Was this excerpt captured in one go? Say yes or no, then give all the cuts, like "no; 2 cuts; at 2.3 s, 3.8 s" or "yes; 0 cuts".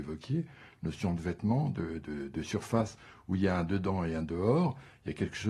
no; 1 cut; at 2.0 s